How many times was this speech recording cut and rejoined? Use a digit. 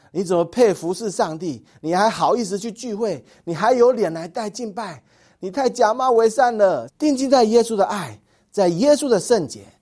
1